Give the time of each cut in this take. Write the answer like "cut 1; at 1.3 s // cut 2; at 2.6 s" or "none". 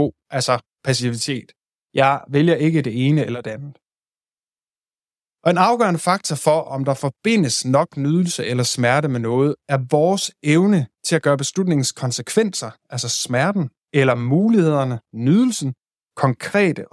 none